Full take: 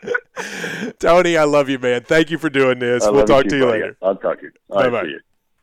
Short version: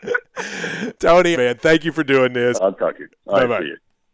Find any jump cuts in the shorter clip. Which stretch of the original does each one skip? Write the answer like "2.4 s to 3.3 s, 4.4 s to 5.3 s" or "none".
1.3 s to 1.8 s, 3.0 s to 4.0 s